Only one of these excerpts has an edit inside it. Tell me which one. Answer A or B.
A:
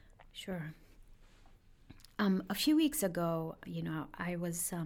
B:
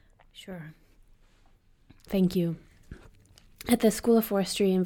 B